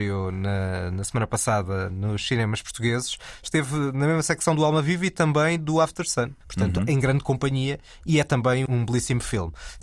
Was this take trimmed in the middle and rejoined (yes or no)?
yes